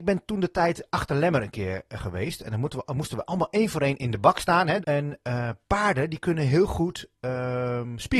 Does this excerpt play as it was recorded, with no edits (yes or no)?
no